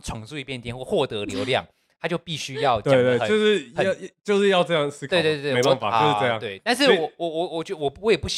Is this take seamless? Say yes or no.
yes